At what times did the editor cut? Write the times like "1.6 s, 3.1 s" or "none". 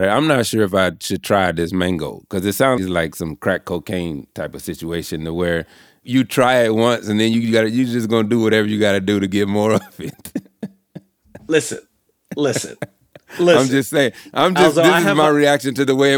2.8 s